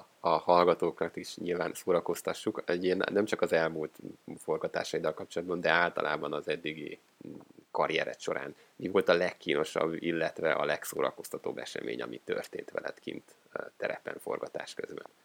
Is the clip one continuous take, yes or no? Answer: yes